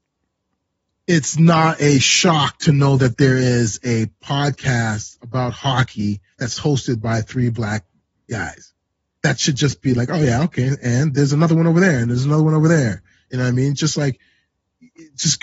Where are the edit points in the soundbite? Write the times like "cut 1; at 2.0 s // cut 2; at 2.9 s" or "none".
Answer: none